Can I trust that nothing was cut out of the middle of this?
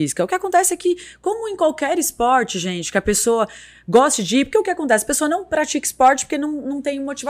yes; 0 cuts

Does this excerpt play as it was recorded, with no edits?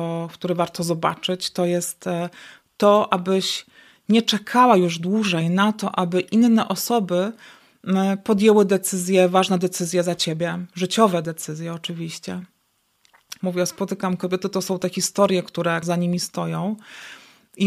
no; 2 cuts; at 13.4 s, 15.8 s

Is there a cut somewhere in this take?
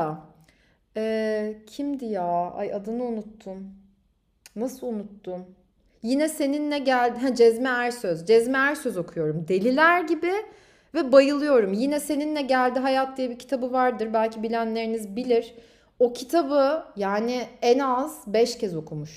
no; 0 cuts

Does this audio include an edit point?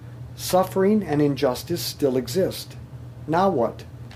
no; 0 cuts

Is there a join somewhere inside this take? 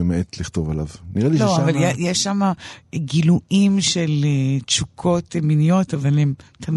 no; 0 cuts

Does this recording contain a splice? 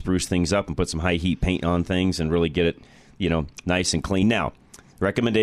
no; 0 cuts

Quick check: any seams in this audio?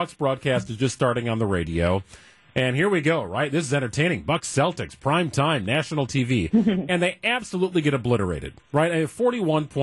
no; 0 cuts

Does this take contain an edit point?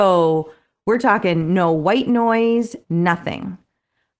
yes; 1 cut; at 2.8 s

